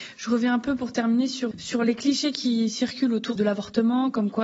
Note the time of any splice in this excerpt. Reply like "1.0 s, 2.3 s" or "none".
1.5 s, 3.4 s

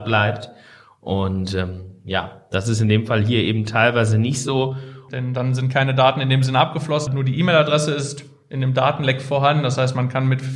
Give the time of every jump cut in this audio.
5.1 s, 7.1 s

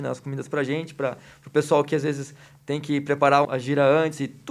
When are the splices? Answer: 3.4 s

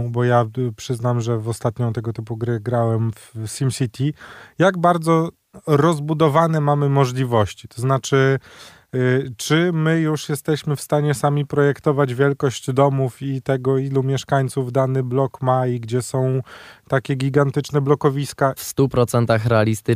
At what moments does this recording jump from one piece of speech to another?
18.6 s

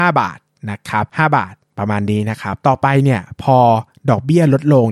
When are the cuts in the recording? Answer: none

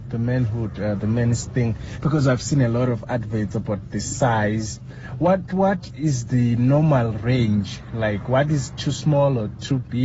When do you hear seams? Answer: 5.5 s

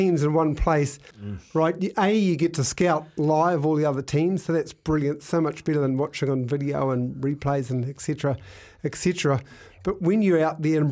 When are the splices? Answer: 1.1 s

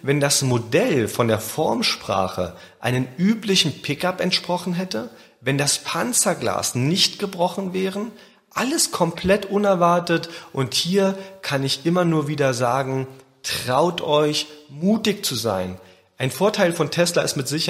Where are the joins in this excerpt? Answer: none

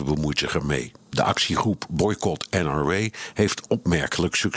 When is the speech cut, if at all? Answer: none

